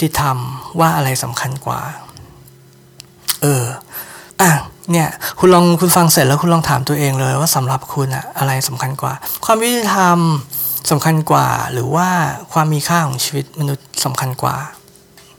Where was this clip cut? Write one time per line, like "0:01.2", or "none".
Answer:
0:04.3